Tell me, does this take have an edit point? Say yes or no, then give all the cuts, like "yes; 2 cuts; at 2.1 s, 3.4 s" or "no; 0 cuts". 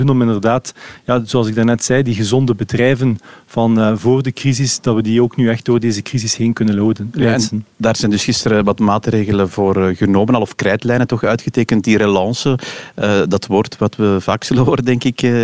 no; 0 cuts